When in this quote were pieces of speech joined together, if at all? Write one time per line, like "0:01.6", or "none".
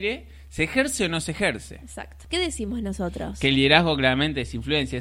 0:02.3